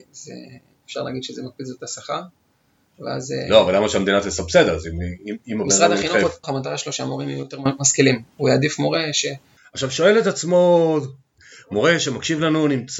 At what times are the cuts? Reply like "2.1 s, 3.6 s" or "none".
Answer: 6.4 s, 9.6 s, 11.4 s